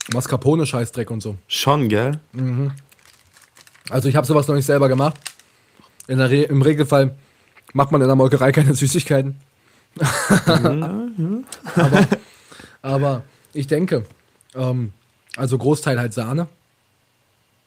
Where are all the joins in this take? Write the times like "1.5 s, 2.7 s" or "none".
10.8 s